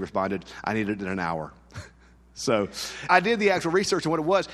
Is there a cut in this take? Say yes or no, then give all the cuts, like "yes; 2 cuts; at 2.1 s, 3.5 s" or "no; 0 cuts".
yes; 1 cut; at 3.1 s